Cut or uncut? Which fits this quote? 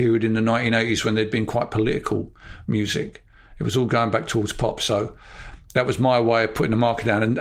uncut